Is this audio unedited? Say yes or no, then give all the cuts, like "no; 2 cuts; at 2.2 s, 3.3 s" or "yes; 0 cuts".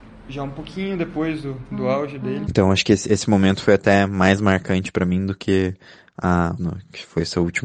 no; 2 cuts; at 2.5 s, 6.6 s